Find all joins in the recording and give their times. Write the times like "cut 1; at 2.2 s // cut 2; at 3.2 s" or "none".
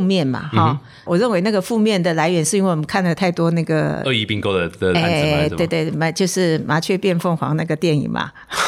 none